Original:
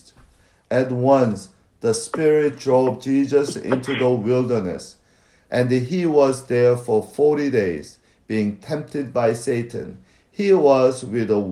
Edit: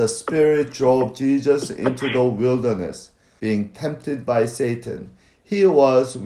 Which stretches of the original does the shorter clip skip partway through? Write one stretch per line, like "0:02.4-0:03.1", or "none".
0:05.2-0:08.3